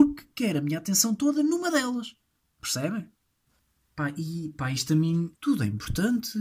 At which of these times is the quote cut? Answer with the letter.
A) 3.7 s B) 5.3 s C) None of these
B